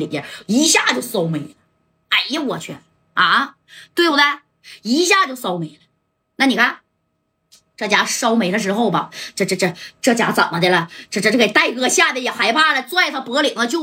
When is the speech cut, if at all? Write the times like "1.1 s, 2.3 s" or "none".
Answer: none

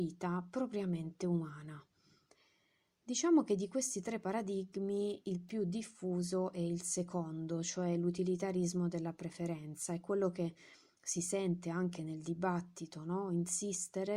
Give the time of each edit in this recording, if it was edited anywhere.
none

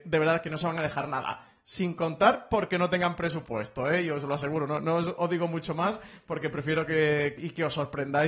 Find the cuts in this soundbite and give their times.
7.4 s

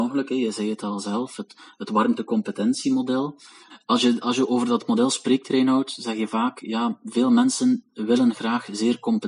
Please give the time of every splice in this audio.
none

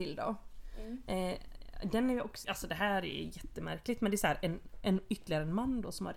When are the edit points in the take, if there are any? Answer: 2.4 s

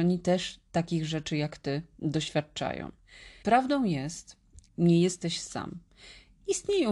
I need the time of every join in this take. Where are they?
3.4 s, 4.7 s

